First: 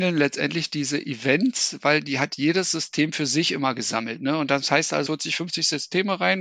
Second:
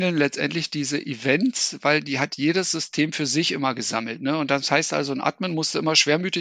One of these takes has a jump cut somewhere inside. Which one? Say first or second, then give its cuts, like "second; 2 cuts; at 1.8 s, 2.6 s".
first; 1 cut; at 5.1 s